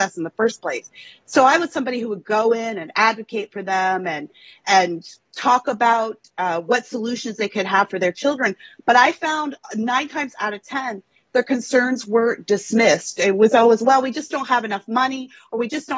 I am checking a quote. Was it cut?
no; 0 cuts

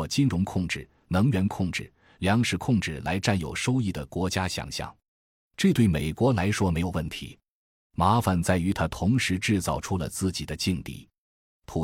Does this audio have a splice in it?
no; 0 cuts

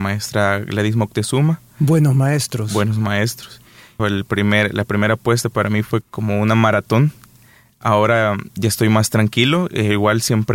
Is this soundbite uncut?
no; 2 cuts; at 4.0 s, 6.0 s

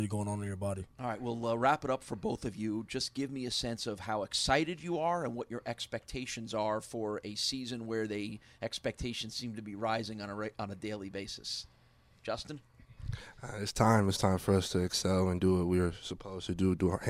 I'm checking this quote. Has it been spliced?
no; 0 cuts

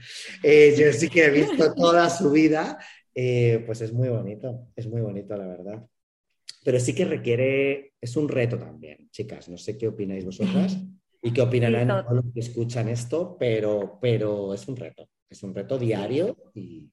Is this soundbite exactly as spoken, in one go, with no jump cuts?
yes; 0 cuts

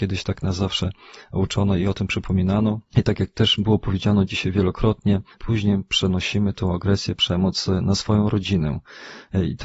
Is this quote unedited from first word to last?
no; 1 cut; at 5.3 s

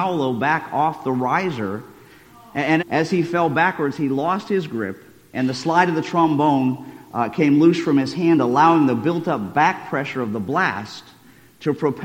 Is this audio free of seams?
no; 1 cut; at 2.8 s

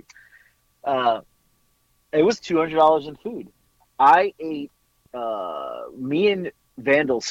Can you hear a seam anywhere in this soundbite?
no; 0 cuts

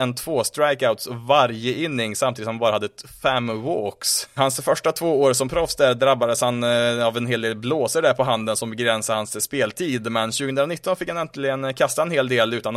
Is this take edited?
yes; 1 cut; at 4.4 s

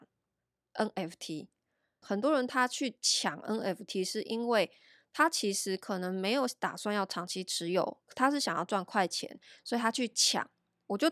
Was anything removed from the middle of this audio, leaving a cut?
yes; 1 cut; at 2.0 s

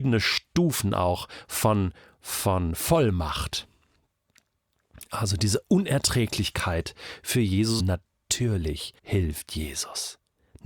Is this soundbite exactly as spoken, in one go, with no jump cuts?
no; 2 cuts; at 7.8 s, 9.0 s

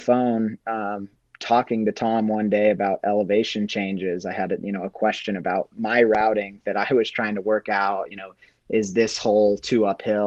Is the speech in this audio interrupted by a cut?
no; 0 cuts

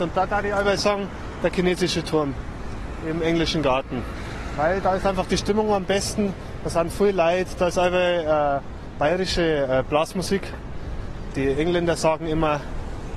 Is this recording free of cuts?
yes; 0 cuts

